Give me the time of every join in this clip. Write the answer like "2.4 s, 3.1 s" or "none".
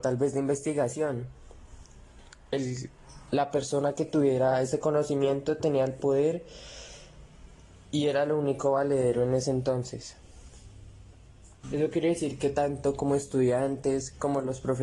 11.6 s